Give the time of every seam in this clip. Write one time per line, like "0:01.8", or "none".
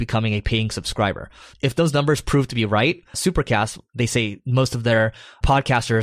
0:03.1